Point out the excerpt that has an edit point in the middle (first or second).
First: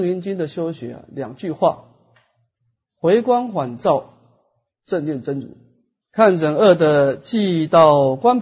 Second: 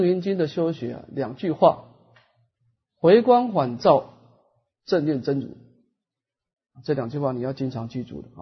first